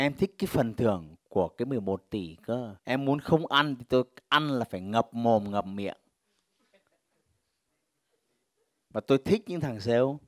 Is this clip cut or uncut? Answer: cut